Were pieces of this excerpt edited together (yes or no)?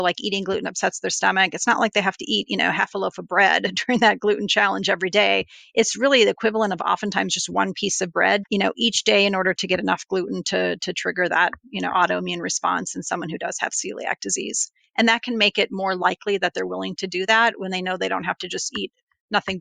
yes